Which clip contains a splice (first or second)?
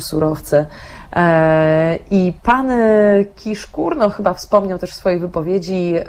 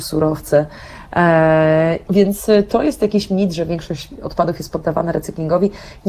second